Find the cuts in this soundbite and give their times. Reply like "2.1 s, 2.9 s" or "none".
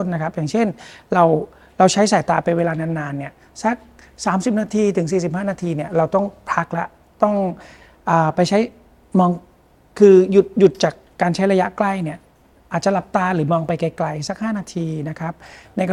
none